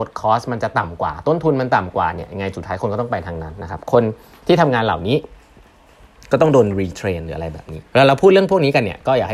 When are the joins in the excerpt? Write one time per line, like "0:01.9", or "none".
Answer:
0:07.9

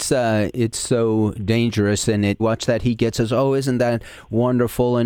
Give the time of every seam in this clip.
0:02.4

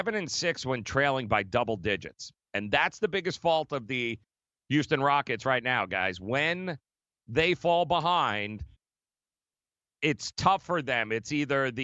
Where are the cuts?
none

